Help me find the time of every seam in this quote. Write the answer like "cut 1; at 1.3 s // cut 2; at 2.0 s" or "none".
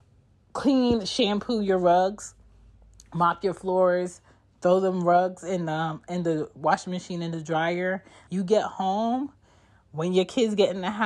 cut 1; at 8.3 s